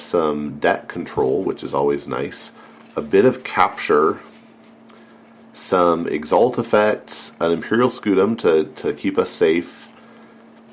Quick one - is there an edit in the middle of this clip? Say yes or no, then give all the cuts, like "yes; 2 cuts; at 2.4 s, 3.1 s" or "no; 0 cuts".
no; 0 cuts